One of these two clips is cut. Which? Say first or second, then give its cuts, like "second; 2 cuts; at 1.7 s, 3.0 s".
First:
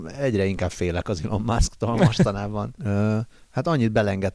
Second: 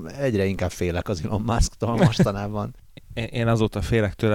first; 1 cut; at 2.8 s